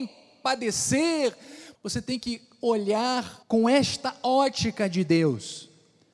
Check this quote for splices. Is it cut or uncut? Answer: cut